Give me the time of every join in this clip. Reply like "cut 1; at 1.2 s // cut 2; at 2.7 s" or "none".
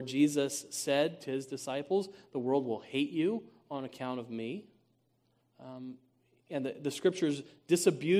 cut 1; at 5.4 s